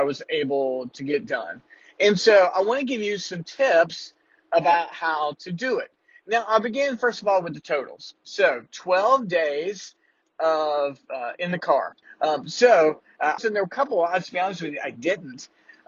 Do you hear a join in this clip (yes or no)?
yes